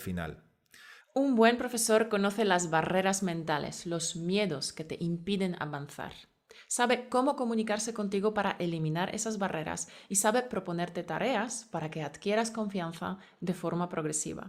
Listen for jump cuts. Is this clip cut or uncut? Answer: cut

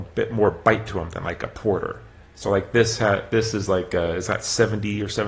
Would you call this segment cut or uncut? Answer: uncut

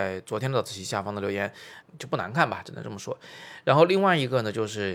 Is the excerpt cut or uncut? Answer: cut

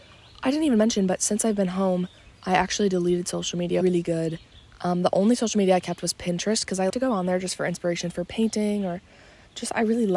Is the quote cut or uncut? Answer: cut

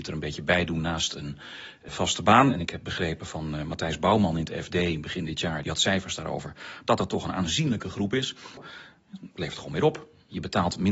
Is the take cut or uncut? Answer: cut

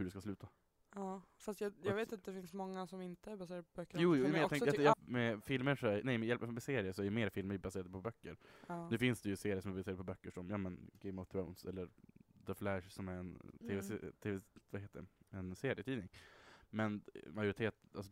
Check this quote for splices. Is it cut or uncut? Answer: cut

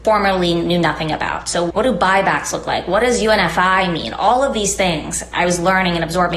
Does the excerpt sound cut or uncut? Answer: uncut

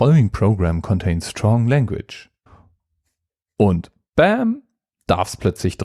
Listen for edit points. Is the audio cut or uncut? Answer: uncut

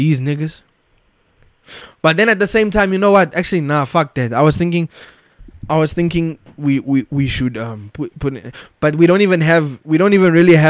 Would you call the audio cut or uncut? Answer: uncut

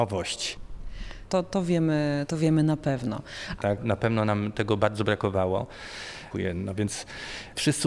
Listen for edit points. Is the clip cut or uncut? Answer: cut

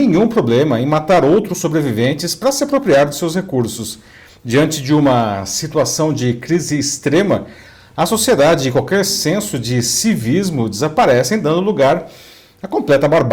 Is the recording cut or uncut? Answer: uncut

